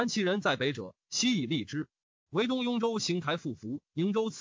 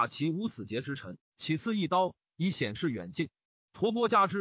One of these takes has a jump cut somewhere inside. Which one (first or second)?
first